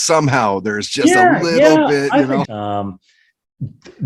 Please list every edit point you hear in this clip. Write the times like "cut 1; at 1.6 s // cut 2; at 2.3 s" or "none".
cut 1; at 2.5 s